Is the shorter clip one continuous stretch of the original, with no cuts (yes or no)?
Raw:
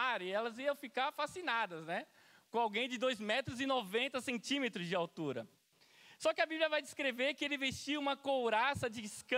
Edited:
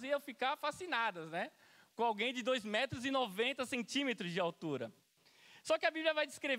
yes